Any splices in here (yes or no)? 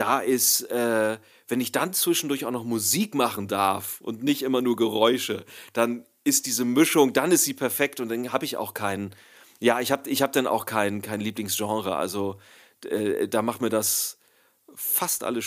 no